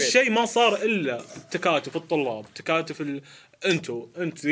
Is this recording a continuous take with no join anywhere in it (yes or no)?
yes